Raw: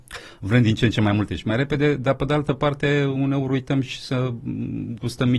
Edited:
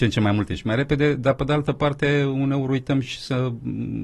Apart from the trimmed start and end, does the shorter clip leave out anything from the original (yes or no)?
no